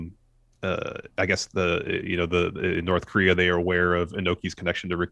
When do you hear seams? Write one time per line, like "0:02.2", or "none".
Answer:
none

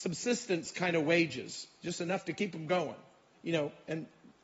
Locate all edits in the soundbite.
0:03.3

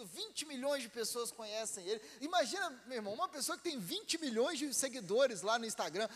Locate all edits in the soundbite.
none

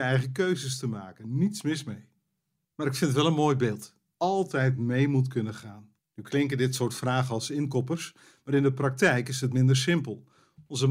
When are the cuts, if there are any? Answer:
0:04.1

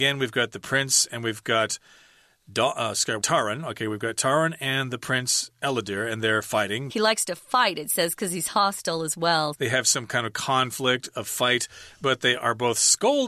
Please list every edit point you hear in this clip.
0:03.2
0:06.9
0:09.5

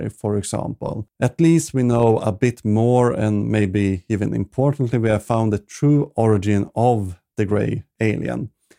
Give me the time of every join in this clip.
none

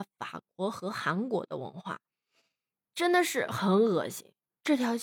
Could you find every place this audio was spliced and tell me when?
none

